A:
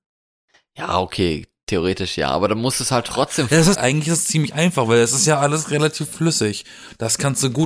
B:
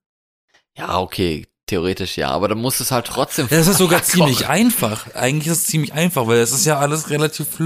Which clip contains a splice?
A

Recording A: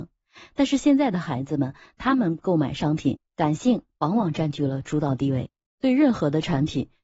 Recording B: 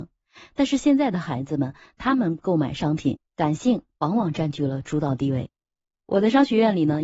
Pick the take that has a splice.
A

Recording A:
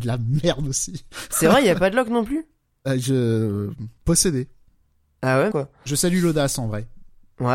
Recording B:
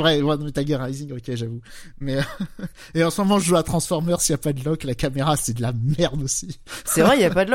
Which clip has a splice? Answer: A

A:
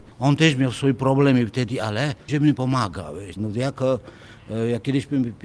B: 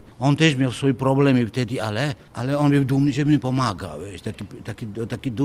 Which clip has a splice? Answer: A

